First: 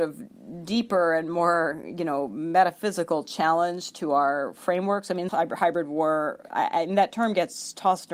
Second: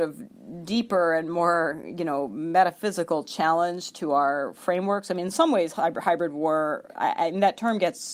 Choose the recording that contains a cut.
first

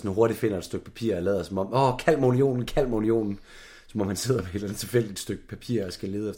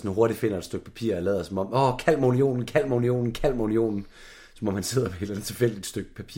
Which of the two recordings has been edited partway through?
first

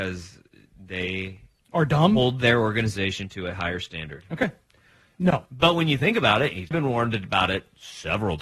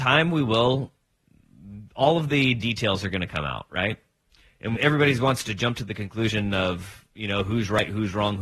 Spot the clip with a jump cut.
first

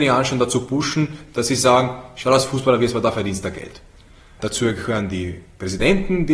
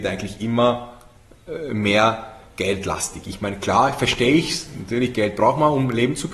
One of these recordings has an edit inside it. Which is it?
first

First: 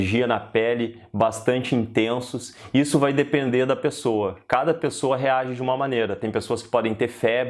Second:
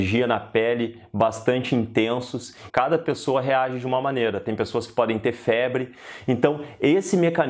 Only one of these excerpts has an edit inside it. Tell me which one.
second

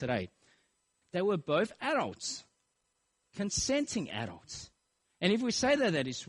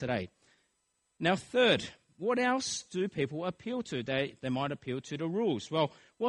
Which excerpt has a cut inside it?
first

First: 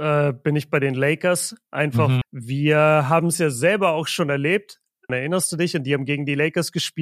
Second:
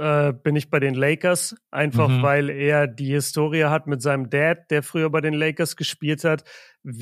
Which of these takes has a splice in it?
first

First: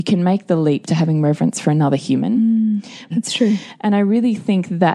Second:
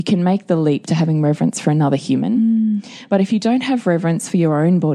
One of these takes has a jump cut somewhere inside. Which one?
first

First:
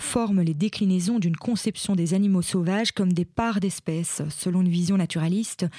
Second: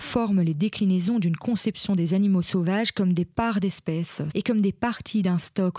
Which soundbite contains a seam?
second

